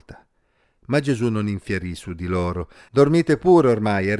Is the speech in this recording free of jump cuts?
no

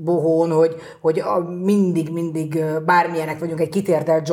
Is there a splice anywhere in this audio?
no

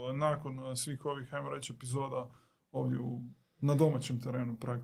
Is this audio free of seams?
yes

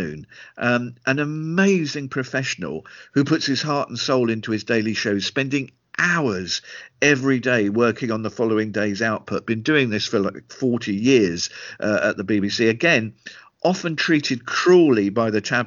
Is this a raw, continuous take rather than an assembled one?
yes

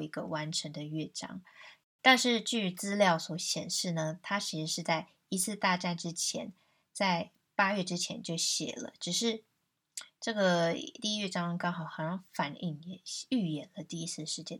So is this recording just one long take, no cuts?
no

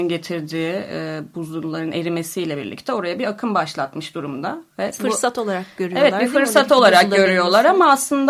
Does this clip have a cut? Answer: no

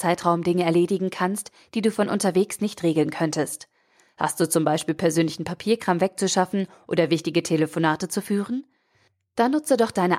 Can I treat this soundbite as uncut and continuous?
yes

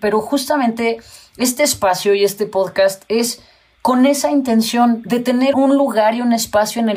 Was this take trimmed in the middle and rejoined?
yes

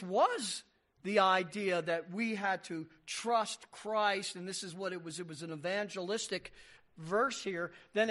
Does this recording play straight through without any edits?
yes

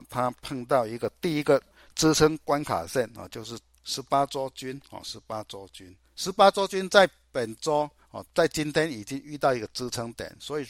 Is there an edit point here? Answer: no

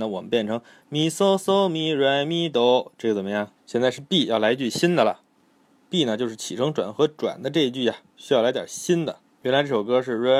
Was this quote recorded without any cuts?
no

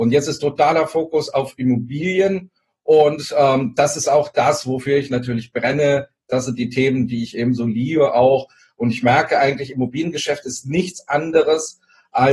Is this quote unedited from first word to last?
yes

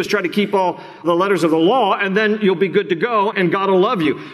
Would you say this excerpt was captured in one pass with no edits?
yes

